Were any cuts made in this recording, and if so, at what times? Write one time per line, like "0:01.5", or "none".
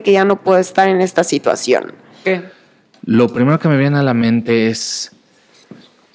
0:02.2